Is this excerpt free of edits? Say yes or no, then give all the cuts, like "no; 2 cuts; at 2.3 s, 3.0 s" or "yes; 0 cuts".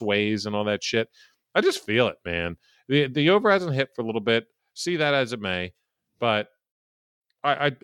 yes; 0 cuts